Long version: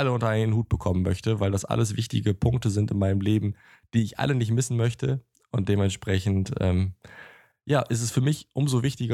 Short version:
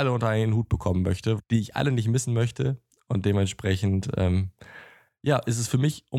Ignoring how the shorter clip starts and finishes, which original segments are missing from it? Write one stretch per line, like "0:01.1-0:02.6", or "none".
0:01.4-0:03.8